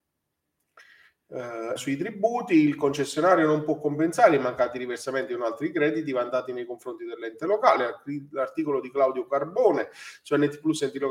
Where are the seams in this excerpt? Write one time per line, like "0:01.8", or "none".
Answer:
0:01.8